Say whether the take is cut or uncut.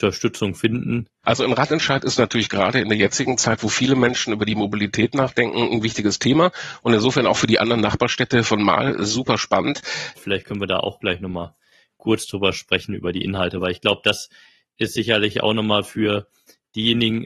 cut